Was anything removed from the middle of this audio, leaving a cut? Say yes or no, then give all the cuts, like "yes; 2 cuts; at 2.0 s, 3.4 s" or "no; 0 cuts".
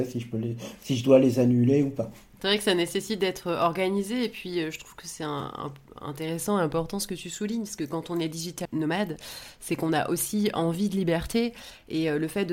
yes; 1 cut; at 8.6 s